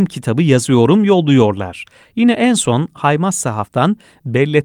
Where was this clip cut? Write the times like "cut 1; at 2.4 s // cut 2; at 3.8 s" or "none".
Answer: none